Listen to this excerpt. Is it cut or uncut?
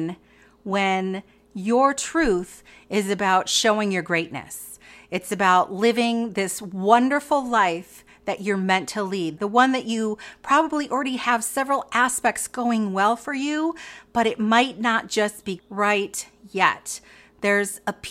cut